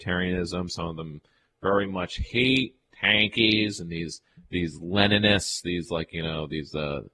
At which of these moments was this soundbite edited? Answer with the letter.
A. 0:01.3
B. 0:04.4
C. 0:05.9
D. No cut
B